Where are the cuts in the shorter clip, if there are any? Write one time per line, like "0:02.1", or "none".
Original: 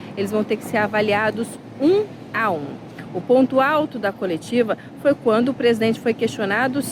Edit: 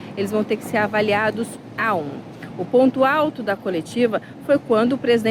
0:01.7